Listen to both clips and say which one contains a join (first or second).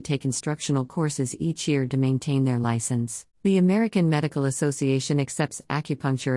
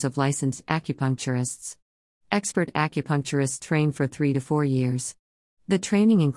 first